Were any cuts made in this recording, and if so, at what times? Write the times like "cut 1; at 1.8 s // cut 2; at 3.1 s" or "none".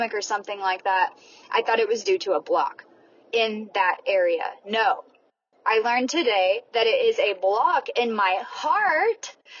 none